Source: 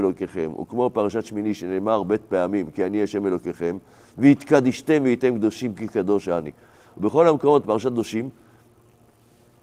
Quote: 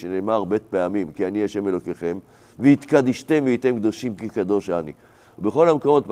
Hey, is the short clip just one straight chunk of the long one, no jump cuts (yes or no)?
yes